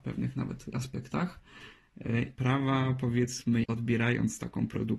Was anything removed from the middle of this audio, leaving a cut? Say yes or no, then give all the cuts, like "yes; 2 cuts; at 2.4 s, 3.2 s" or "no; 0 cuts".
yes; 2 cuts; at 2.4 s, 3.6 s